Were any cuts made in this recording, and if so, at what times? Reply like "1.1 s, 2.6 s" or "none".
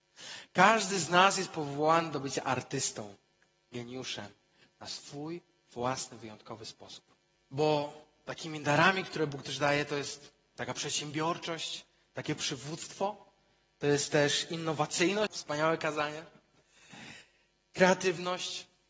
7.4 s, 15.3 s